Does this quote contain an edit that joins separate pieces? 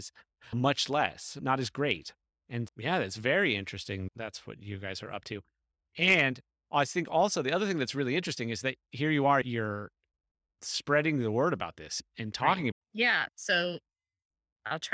yes; 2 cuts; at 9.4 s, 12.7 s

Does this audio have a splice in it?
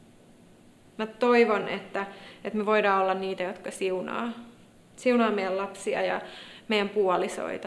no; 0 cuts

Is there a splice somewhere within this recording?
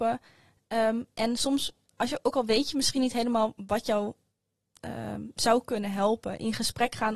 no; 0 cuts

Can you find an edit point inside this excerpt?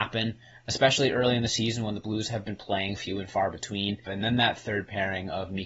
yes; 2 cuts; at 3.0 s, 4.1 s

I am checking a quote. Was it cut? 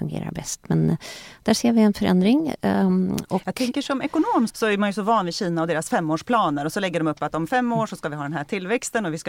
yes; 1 cut; at 4.5 s

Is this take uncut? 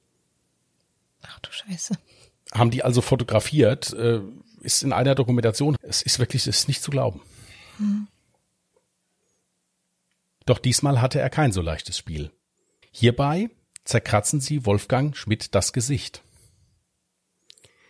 no; 3 cuts; at 5.8 s, 10.4 s, 12.8 s

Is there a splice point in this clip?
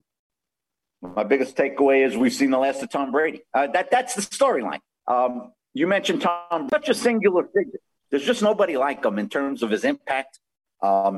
yes; 1 cut; at 8.1 s

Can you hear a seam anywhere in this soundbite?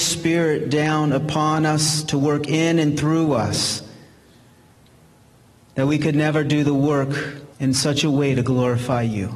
yes; 1 cut; at 7.5 s

